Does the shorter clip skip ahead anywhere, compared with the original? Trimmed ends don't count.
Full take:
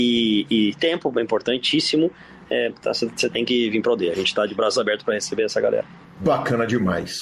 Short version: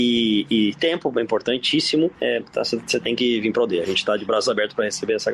yes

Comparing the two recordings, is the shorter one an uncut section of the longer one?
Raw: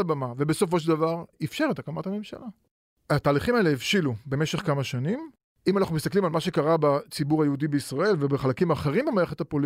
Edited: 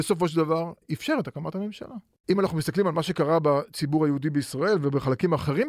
no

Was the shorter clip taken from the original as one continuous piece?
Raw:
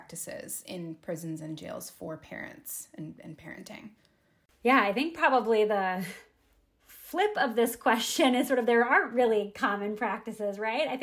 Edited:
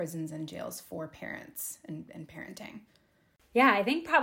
yes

